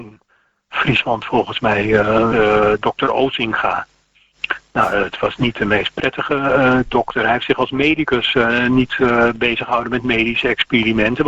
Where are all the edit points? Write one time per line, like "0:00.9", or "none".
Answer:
0:02.3